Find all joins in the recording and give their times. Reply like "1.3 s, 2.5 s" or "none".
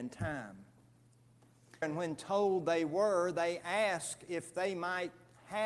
1.8 s